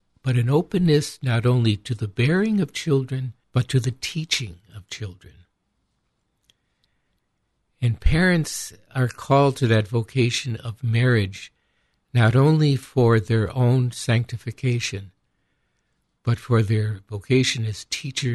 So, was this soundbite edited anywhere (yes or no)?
yes